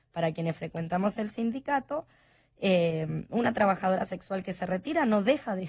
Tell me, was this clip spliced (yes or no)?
no